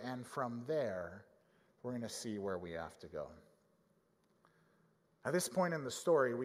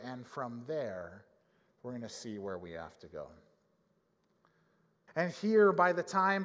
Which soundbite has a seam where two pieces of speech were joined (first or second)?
second